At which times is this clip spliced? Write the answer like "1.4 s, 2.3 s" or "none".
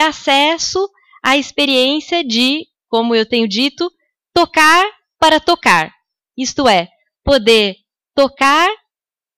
none